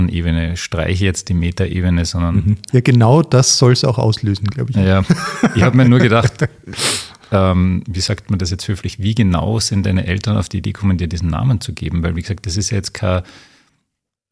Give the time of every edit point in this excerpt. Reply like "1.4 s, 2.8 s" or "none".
2.7 s